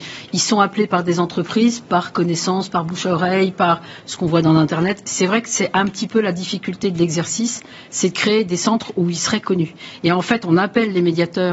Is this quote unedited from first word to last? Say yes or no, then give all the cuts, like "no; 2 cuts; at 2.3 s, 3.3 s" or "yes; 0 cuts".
yes; 0 cuts